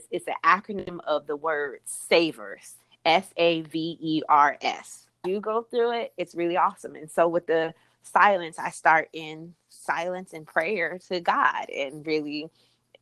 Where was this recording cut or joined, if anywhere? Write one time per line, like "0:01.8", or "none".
0:05.2